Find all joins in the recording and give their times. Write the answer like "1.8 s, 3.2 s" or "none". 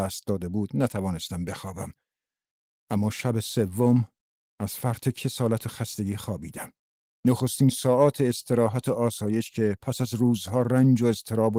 none